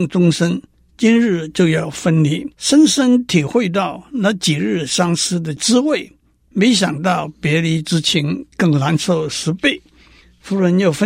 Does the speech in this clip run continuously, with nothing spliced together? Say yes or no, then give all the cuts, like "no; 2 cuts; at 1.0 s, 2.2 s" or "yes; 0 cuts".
no; 1 cut; at 2.5 s